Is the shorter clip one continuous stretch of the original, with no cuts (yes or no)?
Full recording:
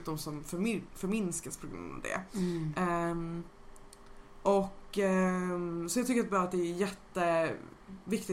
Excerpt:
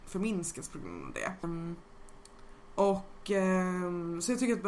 no